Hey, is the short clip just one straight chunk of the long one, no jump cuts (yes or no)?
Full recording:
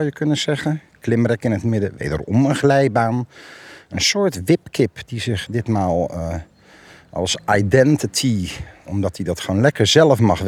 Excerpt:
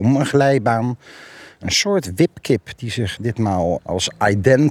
no